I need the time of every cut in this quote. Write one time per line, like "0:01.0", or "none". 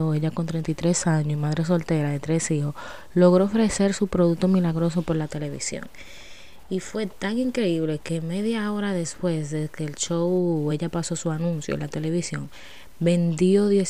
none